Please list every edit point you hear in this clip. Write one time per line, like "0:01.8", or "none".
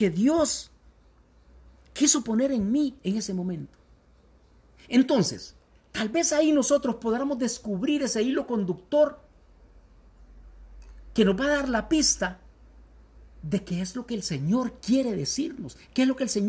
none